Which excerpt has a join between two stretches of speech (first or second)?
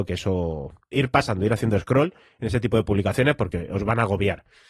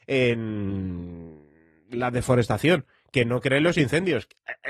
first